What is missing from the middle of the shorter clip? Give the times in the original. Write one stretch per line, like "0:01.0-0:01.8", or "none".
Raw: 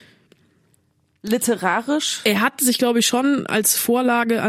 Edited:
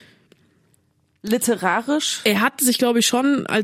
none